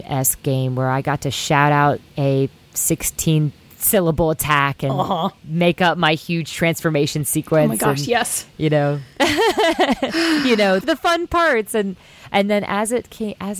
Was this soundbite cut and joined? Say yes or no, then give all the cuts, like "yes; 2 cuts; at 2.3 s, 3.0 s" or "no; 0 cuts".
yes; 1 cut; at 10.8 s